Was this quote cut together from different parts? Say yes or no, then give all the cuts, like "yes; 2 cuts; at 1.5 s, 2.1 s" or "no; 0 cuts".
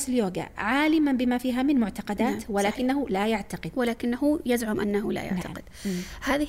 no; 0 cuts